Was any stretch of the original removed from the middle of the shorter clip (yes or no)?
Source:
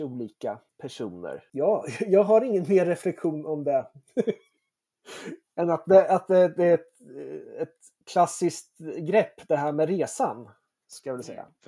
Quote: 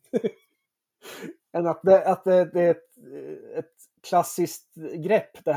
no